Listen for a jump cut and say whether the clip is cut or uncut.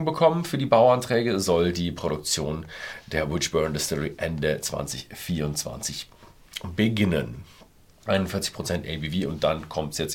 cut